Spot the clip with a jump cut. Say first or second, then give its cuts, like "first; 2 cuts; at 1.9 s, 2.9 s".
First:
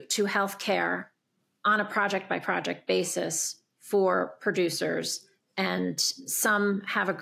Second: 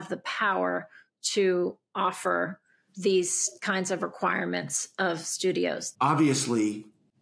second; 2 cuts; at 2.9 s, 5.9 s